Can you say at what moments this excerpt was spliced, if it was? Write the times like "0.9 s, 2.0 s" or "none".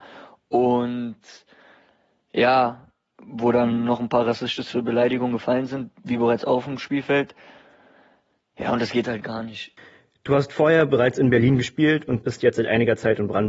3.1 s